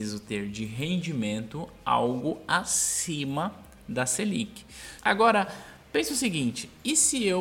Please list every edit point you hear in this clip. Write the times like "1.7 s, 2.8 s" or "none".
5.0 s